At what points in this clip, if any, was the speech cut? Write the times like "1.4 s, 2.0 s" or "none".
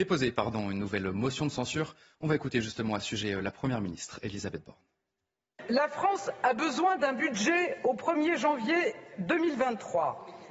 none

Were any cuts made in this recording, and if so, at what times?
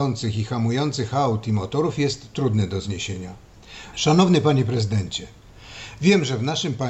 3.9 s

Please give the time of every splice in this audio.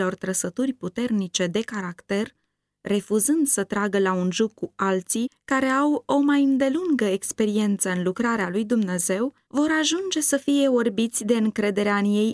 9.4 s

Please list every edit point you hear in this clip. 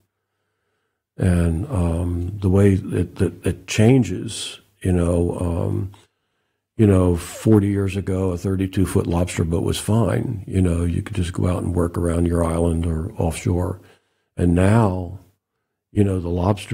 none

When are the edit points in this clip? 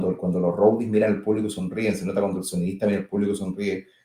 none

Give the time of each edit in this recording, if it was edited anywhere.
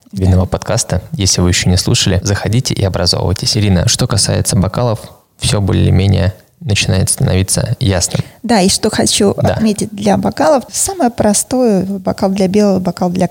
none

